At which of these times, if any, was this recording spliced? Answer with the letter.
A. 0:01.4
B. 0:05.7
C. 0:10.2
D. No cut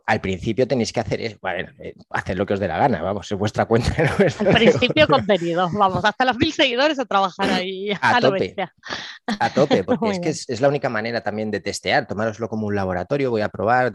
D